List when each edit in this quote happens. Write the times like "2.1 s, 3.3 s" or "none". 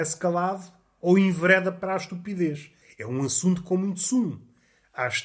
2.8 s